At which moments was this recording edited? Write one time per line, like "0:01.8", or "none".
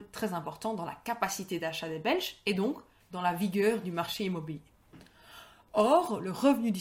0:03.0